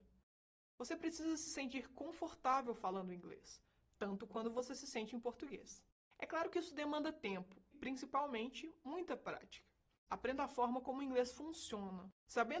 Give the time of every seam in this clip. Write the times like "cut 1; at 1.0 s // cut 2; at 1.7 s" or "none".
cut 1; at 7.7 s // cut 2; at 10.1 s